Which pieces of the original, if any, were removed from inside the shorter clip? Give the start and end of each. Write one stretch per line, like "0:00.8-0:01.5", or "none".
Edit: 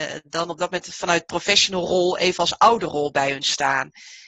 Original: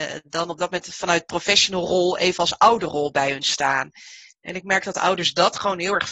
none